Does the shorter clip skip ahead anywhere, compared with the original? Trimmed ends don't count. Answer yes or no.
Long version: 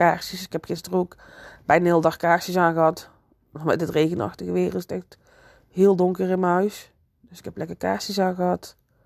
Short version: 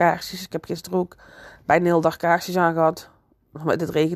no